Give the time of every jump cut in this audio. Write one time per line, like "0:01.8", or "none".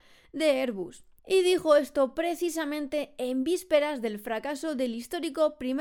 0:01.2